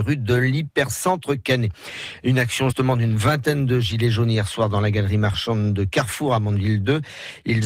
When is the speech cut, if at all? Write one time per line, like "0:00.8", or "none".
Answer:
0:02.7